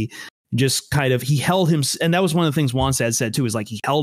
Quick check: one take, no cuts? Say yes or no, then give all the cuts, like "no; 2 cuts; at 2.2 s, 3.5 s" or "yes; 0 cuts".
yes; 0 cuts